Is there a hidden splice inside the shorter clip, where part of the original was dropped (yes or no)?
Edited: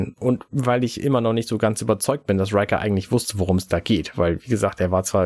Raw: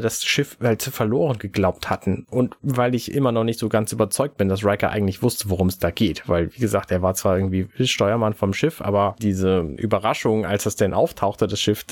no